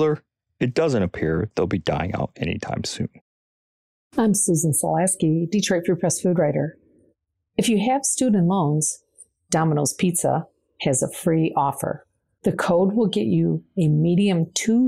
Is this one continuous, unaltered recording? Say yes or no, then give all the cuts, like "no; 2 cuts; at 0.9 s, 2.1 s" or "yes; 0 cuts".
no; 1 cut; at 12.4 s